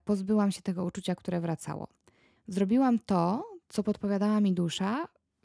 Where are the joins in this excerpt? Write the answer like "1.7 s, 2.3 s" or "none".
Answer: 2.4 s